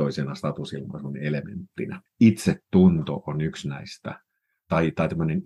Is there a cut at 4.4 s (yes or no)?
no